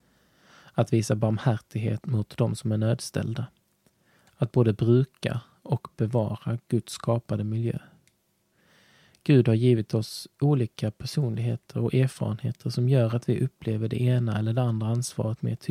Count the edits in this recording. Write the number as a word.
one